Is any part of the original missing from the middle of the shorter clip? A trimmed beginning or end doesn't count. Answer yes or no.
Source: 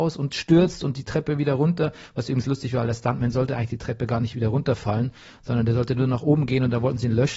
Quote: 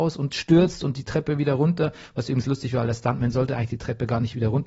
no